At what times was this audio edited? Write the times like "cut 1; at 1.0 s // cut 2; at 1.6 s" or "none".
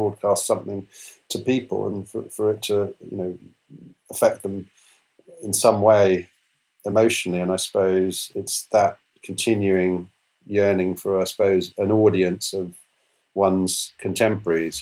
none

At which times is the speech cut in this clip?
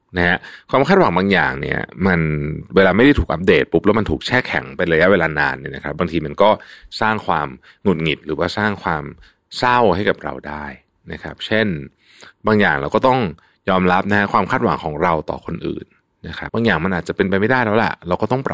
cut 1; at 16.5 s

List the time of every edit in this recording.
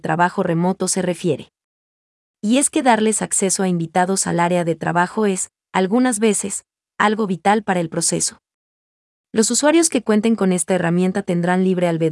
none

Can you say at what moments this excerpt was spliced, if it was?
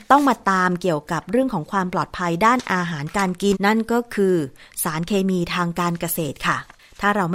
cut 1; at 3.5 s

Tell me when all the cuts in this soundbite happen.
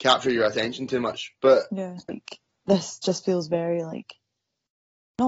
cut 1; at 2.1 s

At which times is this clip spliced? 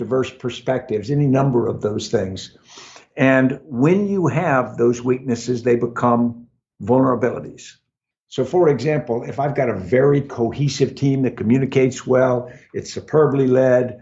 cut 1; at 8.1 s

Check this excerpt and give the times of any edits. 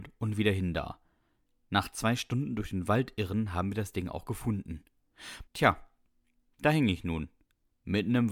cut 1; at 5.5 s

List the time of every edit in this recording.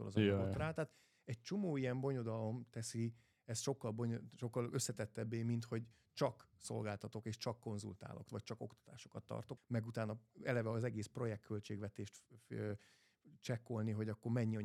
cut 1; at 8.3 s // cut 2; at 9.6 s

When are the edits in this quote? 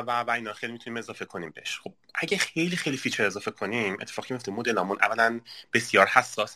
none

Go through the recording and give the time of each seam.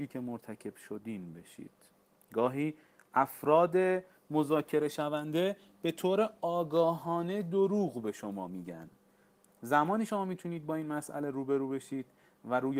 none

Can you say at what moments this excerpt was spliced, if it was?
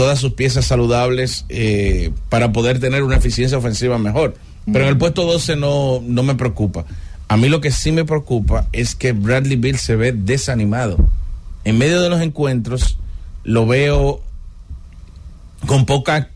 cut 1; at 4.7 s

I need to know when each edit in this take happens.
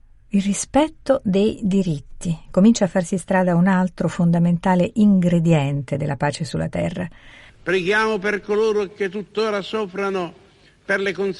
cut 1; at 7.5 s

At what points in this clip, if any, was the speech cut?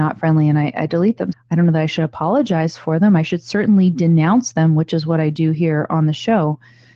cut 1; at 1.3 s

